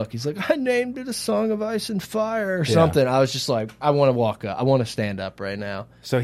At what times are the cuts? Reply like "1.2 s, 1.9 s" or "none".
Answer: none